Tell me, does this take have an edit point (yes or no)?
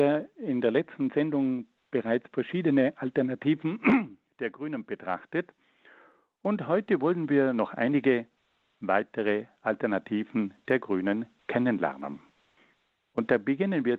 no